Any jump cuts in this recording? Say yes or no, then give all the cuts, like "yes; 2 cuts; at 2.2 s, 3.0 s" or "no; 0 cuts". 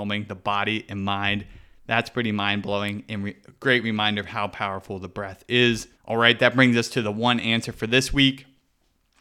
yes; 1 cut; at 5.9 s